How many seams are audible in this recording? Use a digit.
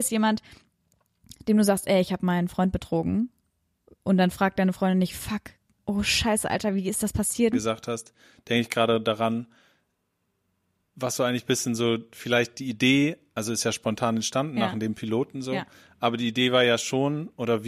1